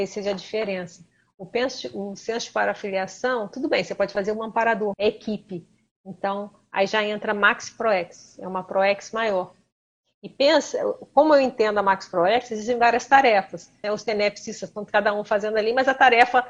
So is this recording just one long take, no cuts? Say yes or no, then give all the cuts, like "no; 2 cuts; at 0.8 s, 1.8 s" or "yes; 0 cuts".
no; 2 cuts; at 4.9 s, 13.8 s